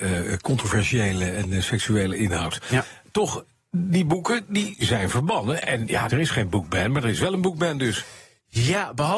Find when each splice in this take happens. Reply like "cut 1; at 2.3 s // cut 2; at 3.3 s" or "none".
cut 1; at 6.1 s